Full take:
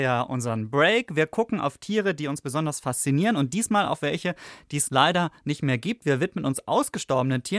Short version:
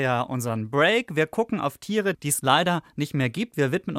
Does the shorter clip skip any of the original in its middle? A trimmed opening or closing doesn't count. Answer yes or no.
yes